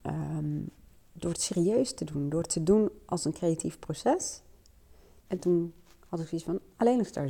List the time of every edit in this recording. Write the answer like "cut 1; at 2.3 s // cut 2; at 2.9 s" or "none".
cut 1; at 5.2 s

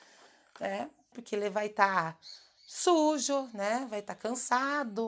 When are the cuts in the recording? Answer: cut 1; at 1.1 s

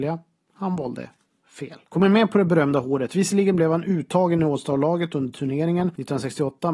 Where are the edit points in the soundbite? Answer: cut 1; at 1.9 s

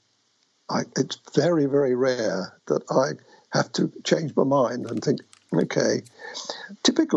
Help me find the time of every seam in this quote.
none

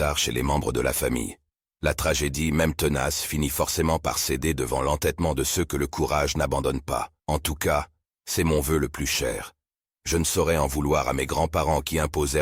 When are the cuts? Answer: cut 1; at 1.7 s // cut 2; at 7.2 s

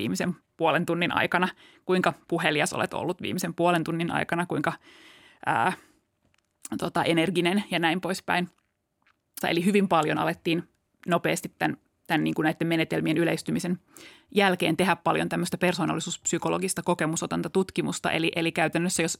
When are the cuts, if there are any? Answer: cut 1; at 9.4 s

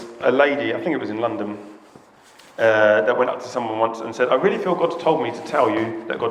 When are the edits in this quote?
none

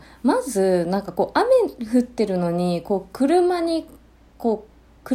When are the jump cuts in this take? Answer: none

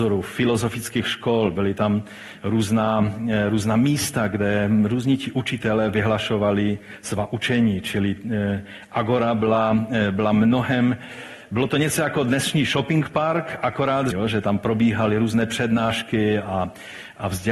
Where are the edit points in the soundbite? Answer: cut 1; at 14.1 s

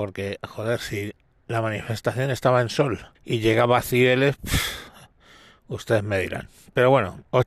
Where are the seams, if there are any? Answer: cut 1; at 3.1 s // cut 2; at 4.4 s

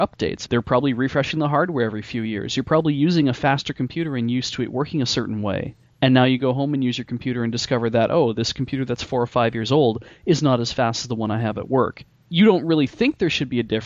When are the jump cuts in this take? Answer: none

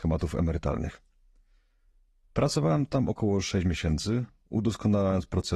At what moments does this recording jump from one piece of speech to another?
none

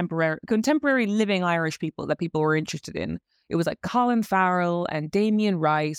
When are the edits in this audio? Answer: none

